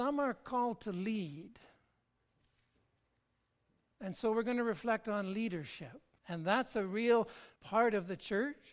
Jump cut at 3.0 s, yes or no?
no